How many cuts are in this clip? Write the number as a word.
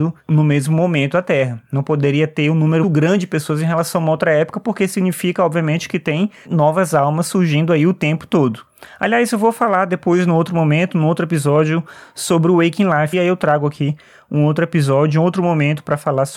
two